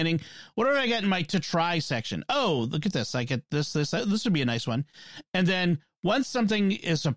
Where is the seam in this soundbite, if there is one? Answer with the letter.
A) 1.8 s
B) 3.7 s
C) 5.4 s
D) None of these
D